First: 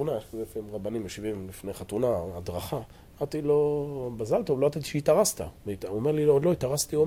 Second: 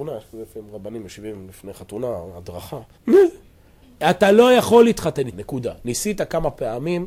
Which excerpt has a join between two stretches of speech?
second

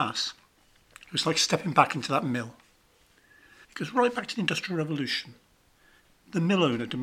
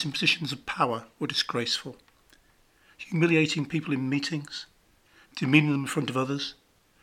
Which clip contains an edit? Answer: first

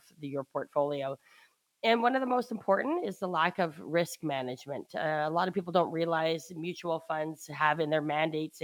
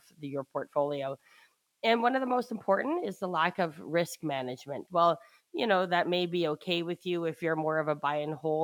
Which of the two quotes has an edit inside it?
second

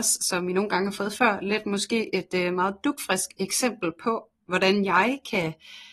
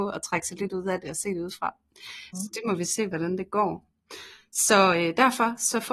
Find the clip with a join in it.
second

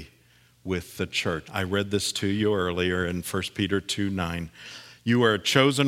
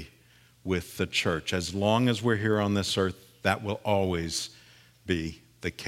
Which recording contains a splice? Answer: first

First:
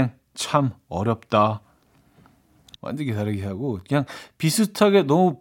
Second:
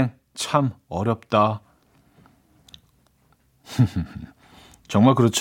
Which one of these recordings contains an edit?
first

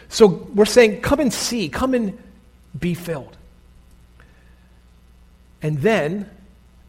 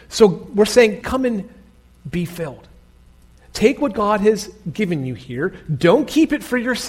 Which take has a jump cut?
second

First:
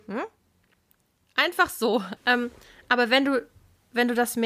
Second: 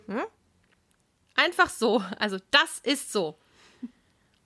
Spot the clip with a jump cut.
first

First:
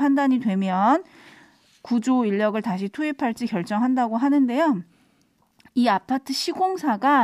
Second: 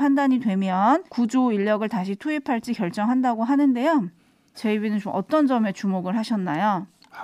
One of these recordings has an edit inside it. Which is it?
second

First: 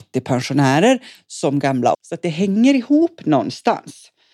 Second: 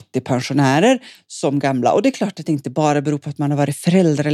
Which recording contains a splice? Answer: first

